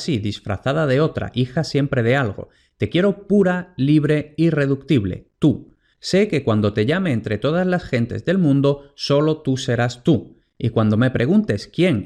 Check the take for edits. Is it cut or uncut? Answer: uncut